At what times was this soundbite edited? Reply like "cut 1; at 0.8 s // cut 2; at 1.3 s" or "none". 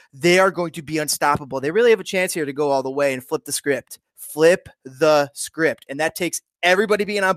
none